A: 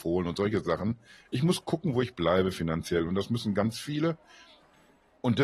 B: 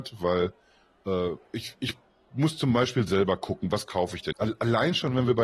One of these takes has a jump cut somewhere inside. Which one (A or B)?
B